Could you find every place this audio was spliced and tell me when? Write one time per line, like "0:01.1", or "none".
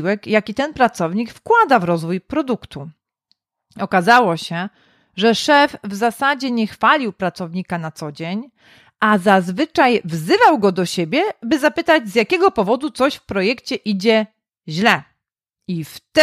none